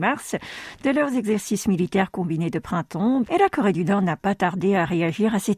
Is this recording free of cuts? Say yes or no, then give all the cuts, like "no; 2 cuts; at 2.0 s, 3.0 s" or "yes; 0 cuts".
no; 1 cut; at 3.2 s